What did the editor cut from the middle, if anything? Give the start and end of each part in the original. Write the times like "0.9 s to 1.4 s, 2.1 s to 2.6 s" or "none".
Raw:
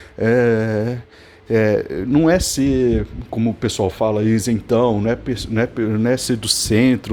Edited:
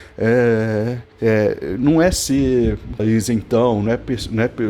1.1 s to 1.4 s, 3.3 s to 4.2 s